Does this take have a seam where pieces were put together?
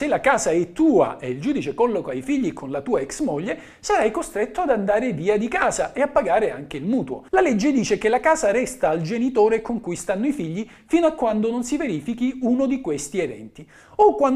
yes; 1 cut; at 7.3 s

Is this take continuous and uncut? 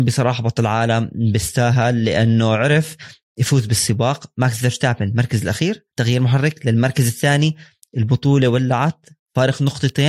no; 1 cut; at 5.9 s

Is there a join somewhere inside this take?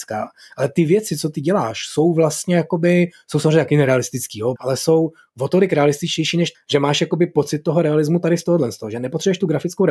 yes; 2 cuts; at 4.6 s, 6.5 s

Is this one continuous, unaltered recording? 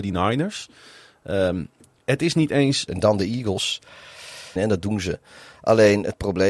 no; 2 cuts; at 2.9 s, 4.6 s

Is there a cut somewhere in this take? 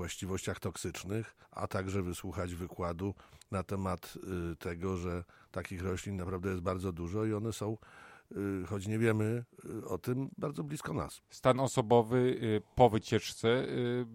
yes; 1 cut; at 1.4 s

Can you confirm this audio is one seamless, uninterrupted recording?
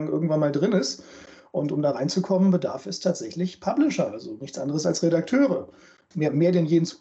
yes; 0 cuts

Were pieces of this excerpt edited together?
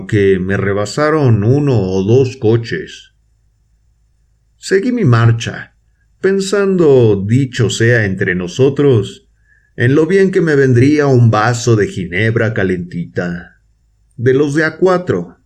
no; 0 cuts

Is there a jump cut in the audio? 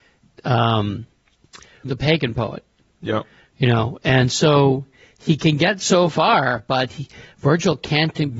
yes; 1 cut; at 1.8 s

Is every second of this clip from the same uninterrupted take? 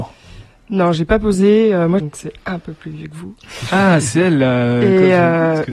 no; 1 cut; at 2.0 s

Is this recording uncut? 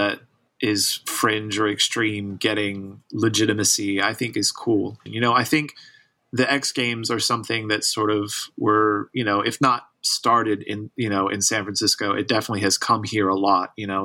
no; 1 cut; at 5.1 s

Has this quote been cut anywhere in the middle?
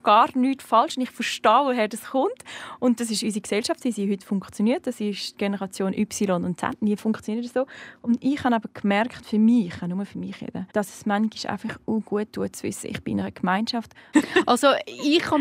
yes; 2 cuts; at 10.7 s, 14.1 s

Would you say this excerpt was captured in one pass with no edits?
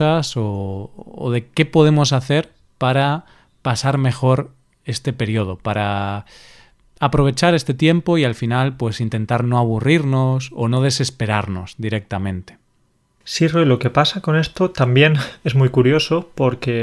yes; 0 cuts

